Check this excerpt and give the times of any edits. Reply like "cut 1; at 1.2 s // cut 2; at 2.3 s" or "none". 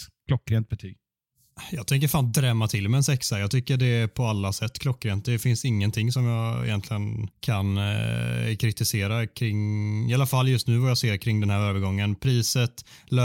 cut 1; at 7.3 s